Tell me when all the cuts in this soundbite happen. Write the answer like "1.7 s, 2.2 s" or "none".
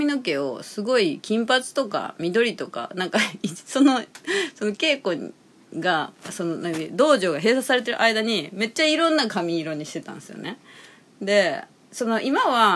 none

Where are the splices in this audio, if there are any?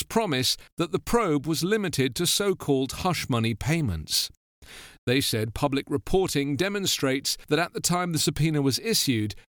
none

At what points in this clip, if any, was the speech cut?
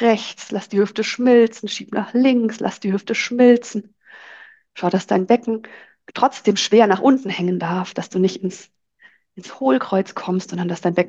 none

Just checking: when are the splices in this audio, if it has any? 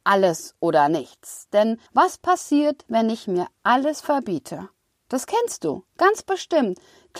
1.9 s

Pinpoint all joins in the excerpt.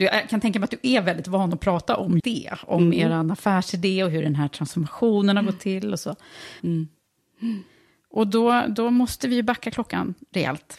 2.2 s, 6.6 s

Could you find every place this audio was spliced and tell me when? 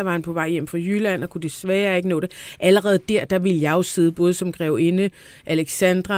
none

